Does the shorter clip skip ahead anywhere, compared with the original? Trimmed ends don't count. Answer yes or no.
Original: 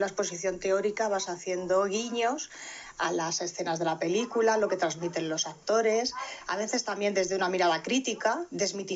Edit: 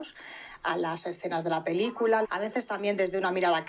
yes